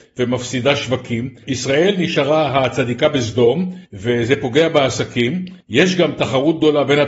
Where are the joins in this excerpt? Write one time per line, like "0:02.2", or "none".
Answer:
0:01.4